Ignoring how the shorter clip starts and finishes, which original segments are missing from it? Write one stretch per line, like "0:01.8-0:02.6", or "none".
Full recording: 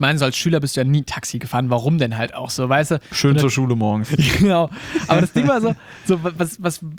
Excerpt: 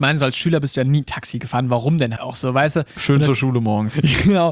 0:02.2-0:02.3